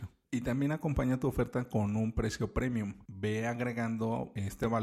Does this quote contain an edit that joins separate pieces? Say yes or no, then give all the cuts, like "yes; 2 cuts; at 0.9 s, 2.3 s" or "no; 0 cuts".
no; 0 cuts